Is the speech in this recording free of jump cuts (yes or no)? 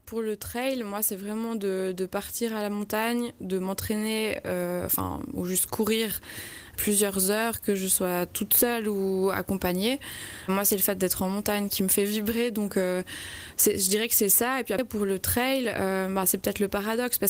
yes